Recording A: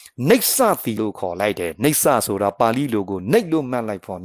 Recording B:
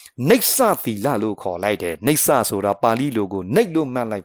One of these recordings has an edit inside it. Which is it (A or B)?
A